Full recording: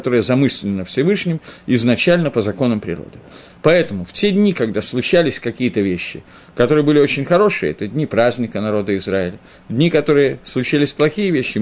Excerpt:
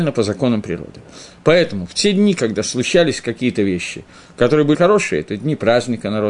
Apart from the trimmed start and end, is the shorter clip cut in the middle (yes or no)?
yes